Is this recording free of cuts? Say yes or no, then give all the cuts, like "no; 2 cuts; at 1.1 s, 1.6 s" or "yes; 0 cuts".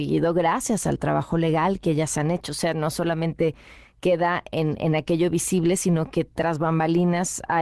no; 1 cut; at 4.8 s